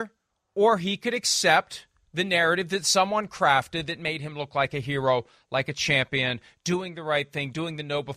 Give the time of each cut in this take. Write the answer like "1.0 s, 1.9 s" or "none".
none